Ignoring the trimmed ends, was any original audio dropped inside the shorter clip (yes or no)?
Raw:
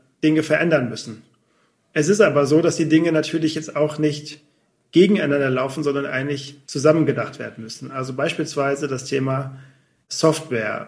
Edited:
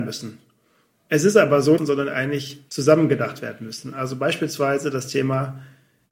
yes